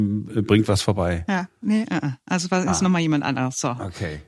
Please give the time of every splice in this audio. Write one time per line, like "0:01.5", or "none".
none